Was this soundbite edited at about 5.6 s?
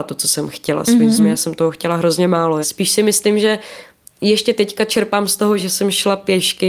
yes; 3 cuts; at 1.2 s, 2.6 s, 5.6 s

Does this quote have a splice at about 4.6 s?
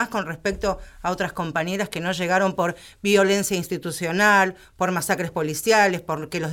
no; 0 cuts

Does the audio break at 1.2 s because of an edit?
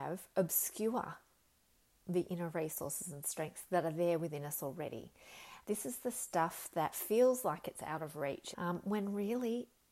no; 2 cuts; at 5.6 s, 8.5 s

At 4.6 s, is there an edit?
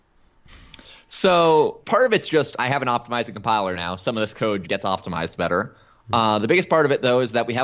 yes; 1 cut; at 4.6 s

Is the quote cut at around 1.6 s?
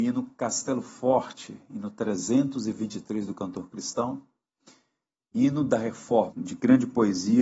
no; 1 cut; at 6.3 s

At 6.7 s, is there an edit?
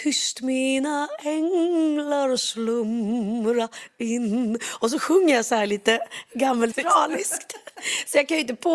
yes; 1 cut; at 6.7 s

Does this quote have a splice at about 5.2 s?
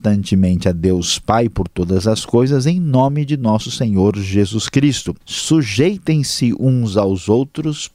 yes; 1 cut; at 5.2 s

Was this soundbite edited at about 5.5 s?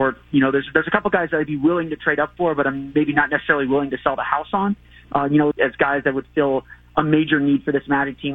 yes; 1 cut; at 5.5 s

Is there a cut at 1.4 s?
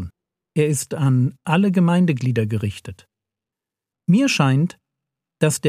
no; 1 cut; at 3.9 s

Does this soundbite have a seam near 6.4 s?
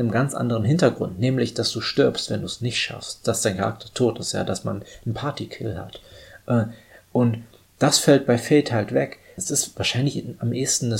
no; 1 cut; at 9.4 s

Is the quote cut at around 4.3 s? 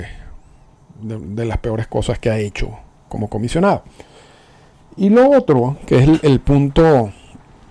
no; 0 cuts

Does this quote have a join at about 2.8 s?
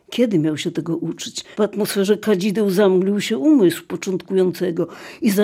no; 1 cut; at 1.5 s

